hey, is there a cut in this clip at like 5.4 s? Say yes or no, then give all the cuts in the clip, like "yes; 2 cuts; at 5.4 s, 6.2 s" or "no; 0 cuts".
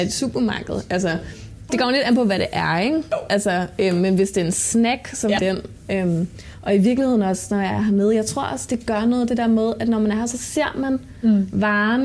yes; 1 cut; at 5.4 s